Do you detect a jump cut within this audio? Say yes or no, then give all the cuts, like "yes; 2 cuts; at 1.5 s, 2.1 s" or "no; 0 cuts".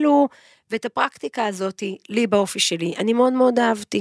no; 0 cuts